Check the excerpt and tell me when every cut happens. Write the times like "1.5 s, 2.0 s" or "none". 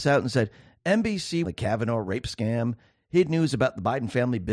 1.4 s